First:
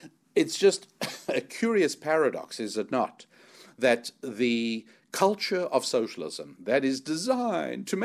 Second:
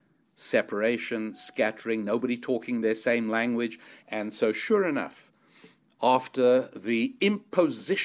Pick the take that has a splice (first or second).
second